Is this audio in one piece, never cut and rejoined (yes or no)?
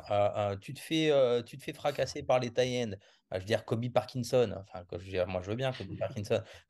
yes